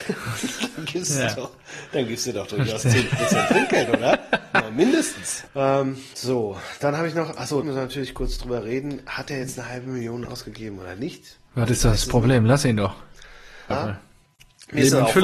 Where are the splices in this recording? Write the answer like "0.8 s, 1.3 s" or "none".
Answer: 5.5 s, 7.6 s, 13.7 s